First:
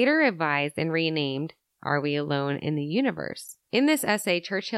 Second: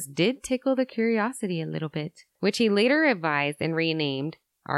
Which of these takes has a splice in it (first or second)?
second